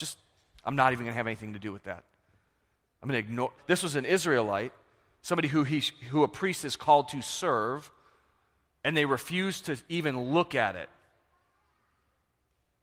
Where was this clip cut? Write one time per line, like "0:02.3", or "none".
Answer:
0:03.6